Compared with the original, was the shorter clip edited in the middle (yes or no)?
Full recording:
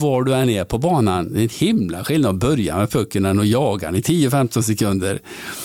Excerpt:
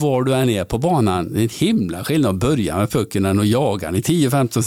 no